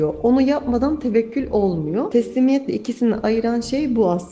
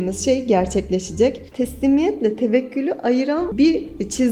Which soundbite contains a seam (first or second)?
second